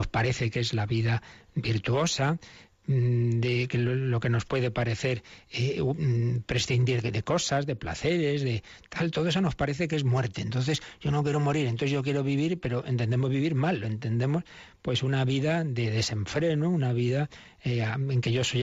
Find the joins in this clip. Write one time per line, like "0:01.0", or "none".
0:07.0